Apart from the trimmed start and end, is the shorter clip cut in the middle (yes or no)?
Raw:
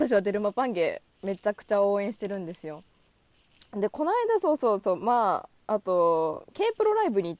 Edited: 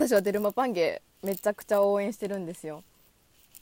no